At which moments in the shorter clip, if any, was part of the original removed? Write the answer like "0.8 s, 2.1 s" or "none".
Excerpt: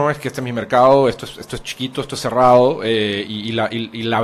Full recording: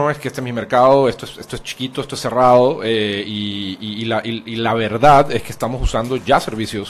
3.2 s